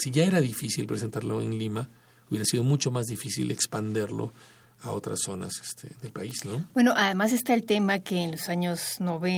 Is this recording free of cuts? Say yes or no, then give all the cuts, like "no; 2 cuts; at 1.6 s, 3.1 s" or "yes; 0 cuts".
yes; 0 cuts